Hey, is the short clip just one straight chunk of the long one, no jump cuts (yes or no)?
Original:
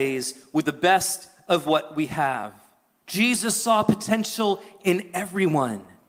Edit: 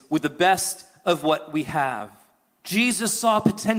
yes